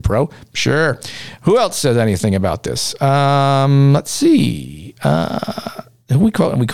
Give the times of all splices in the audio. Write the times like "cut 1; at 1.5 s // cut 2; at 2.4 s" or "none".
none